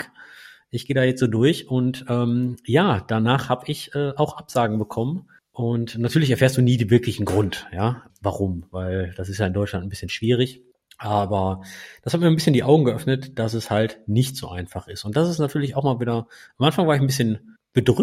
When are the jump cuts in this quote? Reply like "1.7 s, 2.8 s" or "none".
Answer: none